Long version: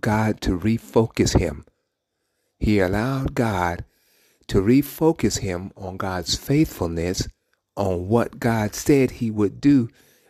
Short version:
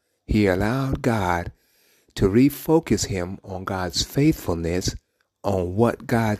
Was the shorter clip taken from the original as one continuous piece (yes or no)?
yes